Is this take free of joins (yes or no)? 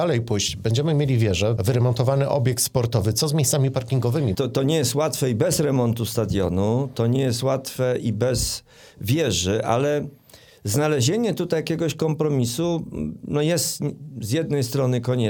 no